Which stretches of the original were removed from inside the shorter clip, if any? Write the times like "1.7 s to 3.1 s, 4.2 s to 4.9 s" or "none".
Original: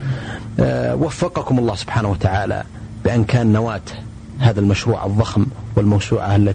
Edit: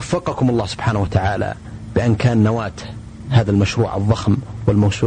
none

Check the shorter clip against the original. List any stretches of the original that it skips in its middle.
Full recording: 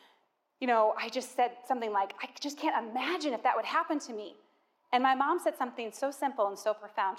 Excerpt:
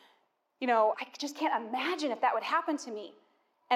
0.9 s to 2.2 s

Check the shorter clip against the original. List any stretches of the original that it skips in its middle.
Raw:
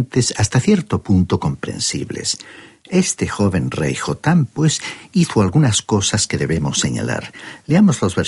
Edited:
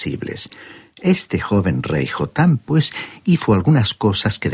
none

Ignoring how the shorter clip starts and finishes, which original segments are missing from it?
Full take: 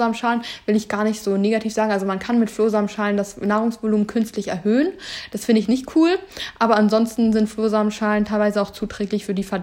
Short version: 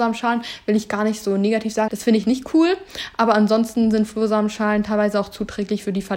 1.9 s to 5.3 s

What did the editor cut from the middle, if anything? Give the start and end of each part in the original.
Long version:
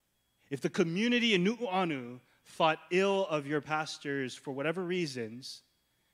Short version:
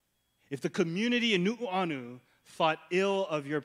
none

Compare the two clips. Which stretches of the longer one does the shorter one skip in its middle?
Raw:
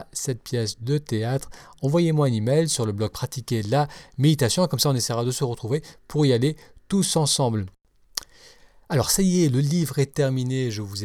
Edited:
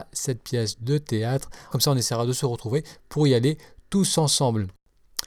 1.7 s to 4.7 s

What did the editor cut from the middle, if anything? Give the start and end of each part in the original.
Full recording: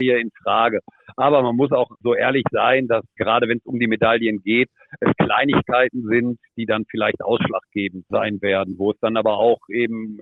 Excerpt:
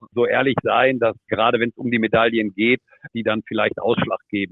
5.0 s to 6.5 s

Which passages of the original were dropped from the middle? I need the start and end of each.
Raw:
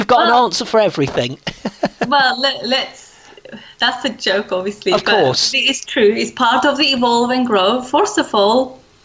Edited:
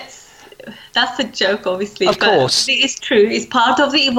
none

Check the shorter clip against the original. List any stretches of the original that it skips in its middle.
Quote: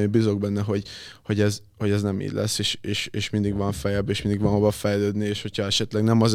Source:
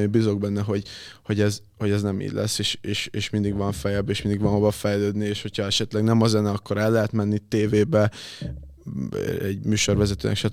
none

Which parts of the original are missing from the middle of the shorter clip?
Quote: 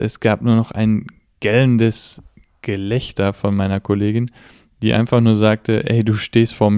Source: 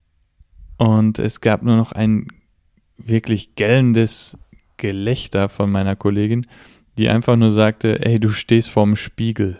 2.6 s to 3.6 s

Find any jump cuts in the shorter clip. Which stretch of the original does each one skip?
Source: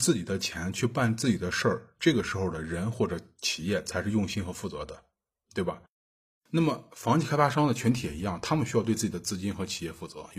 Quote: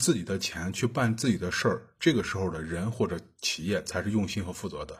none

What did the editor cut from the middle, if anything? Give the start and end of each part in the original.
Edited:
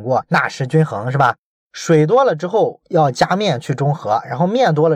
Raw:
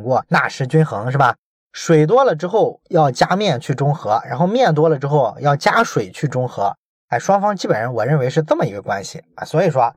none

